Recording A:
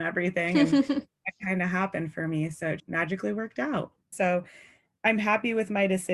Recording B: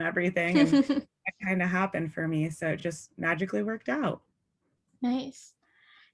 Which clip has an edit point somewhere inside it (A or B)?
A